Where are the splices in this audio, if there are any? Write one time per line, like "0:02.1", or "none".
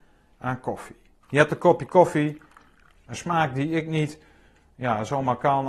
0:01.2
0:03.0